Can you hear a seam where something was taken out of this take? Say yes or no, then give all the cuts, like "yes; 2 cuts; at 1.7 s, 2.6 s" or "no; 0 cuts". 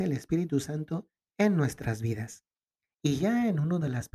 yes; 1 cut; at 2.9 s